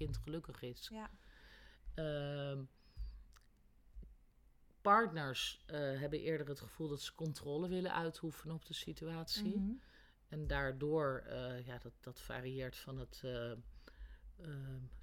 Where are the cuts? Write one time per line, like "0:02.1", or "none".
none